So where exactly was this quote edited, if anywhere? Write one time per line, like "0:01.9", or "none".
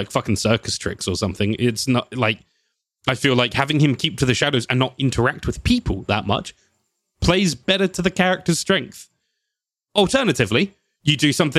none